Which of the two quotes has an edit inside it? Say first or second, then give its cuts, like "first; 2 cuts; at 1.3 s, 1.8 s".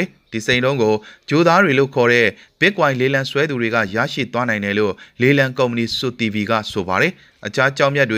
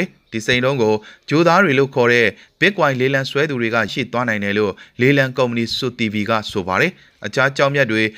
second; 1 cut; at 3.9 s